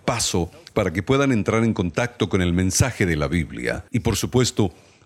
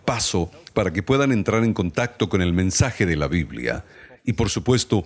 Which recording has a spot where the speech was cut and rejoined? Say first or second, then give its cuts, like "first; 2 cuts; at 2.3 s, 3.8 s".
first; 1 cut; at 3.9 s